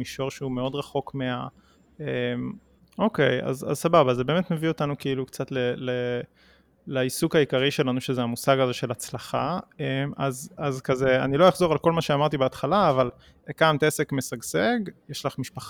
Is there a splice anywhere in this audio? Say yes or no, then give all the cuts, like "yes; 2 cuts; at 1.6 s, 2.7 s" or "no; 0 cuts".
yes; 1 cut; at 2.8 s